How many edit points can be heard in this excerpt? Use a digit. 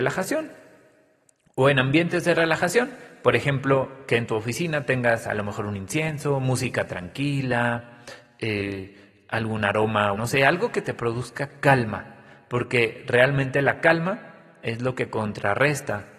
1